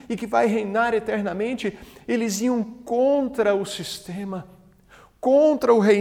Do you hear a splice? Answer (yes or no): no